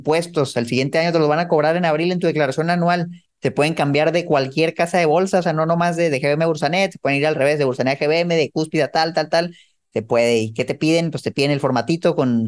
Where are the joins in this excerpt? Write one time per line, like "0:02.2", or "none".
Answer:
0:03.3
0:09.8